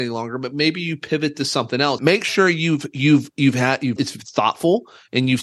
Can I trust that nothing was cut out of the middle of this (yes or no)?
no